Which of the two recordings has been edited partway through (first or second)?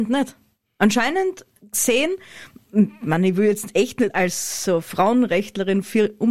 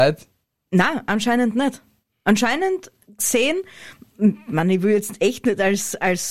first